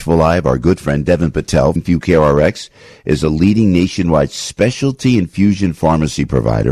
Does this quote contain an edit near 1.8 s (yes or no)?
yes